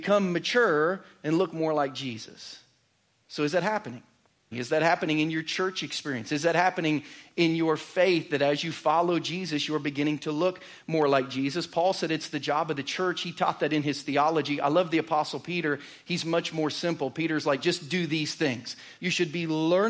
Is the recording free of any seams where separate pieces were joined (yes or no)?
no